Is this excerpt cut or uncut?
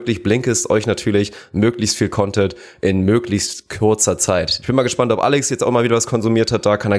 cut